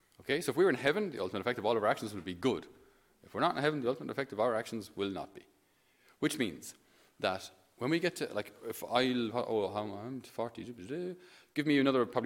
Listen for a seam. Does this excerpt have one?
no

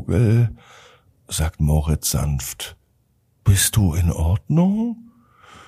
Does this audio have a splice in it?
no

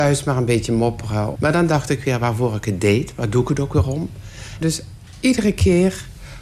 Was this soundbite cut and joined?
yes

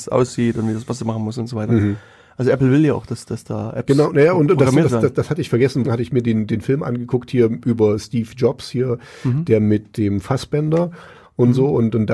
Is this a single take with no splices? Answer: no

